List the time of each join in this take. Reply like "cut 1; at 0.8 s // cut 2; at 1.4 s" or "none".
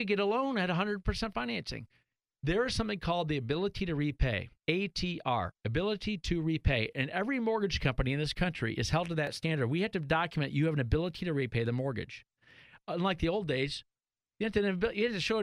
cut 1; at 4.6 s